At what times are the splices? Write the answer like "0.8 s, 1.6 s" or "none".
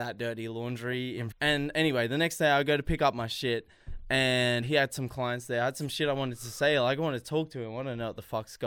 1.3 s, 4.6 s